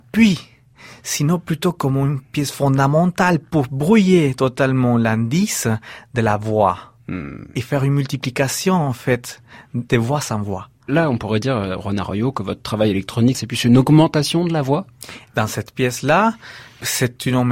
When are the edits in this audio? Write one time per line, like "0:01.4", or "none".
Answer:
0:13.3